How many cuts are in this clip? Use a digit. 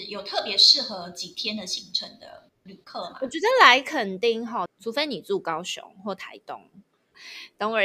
1